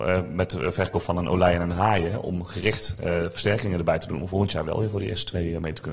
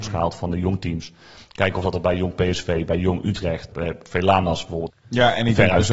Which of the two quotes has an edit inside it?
second; 2 cuts; at 3.7 s, 4.9 s

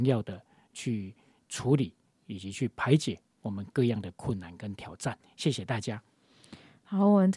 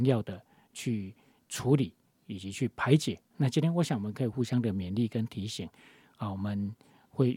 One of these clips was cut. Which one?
second; 1 cut; at 3.3 s

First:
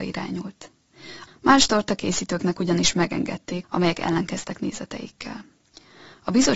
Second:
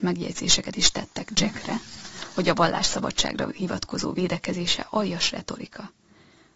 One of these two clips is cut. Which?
first; 2 cuts; at 1.3 s, 3.6 s

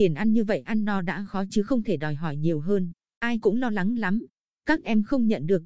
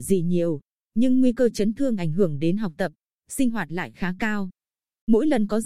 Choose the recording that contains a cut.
first; 1 cut; at 3.1 s

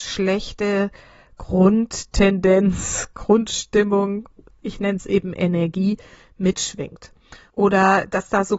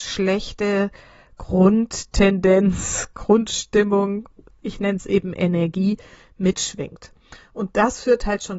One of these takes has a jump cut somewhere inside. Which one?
first; 1 cut; at 7.5 s

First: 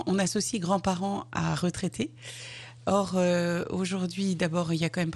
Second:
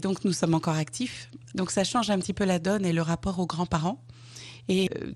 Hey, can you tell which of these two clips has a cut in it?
second; 1 cut; at 1.5 s

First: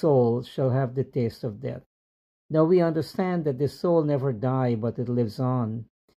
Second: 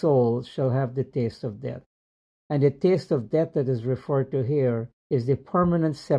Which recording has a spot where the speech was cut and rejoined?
second; 2 cuts; at 2.3 s, 5.0 s

